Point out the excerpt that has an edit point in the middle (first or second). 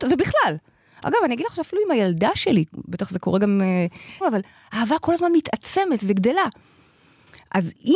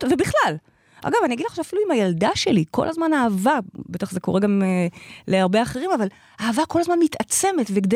first